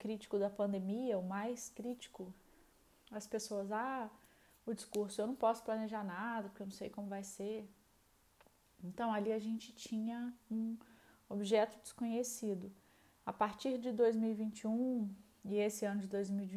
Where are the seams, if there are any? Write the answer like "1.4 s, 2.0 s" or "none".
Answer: none